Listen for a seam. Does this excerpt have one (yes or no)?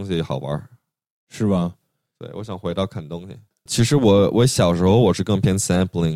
yes